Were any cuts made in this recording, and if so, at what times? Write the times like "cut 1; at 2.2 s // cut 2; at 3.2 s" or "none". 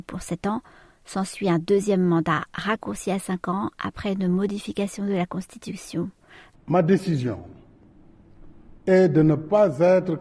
cut 1; at 6.5 s // cut 2; at 8.8 s

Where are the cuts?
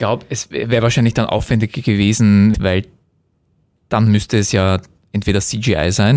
cut 1; at 2.5 s

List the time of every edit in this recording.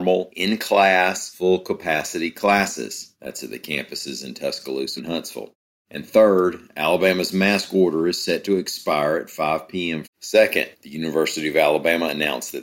cut 1; at 5.0 s // cut 2; at 10.0 s

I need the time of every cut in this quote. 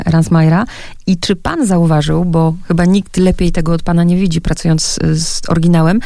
none

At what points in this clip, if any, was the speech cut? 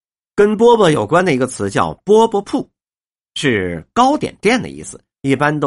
none

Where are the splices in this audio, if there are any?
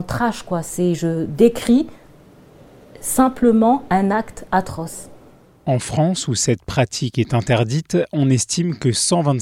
none

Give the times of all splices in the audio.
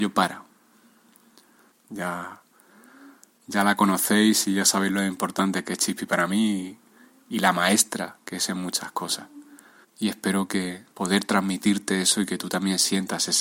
cut 1; at 1.7 s // cut 2; at 9.8 s // cut 3; at 10.9 s

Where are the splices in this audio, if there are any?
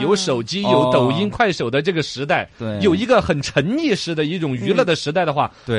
none

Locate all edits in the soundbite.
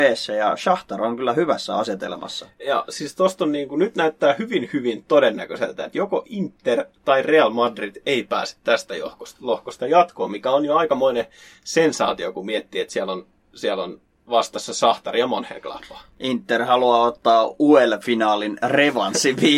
none

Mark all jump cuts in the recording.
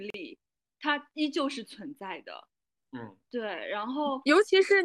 cut 1; at 2.8 s

